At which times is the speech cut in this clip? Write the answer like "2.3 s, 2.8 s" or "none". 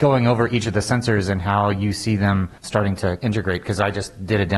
2.6 s